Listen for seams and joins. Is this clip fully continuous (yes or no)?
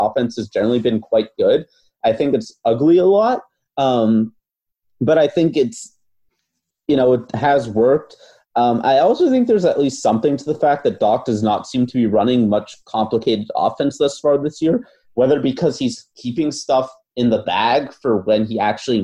yes